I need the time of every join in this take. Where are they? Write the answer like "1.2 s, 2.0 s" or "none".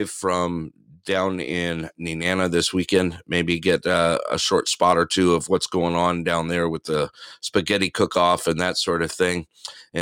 none